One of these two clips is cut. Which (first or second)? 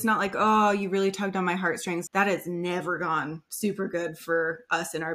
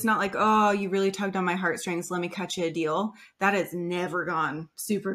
first